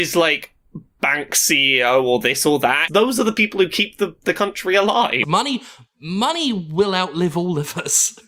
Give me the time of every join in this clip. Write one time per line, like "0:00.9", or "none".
0:02.9
0:05.2